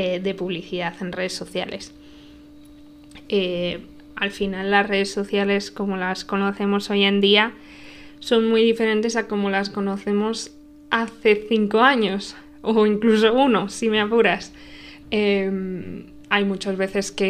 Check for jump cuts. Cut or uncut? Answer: cut